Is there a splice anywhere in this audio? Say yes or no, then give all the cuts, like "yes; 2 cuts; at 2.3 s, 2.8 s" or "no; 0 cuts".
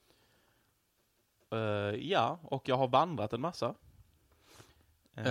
no; 0 cuts